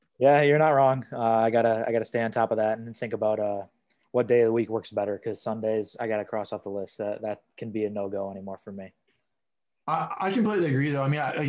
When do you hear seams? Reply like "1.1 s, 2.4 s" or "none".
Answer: none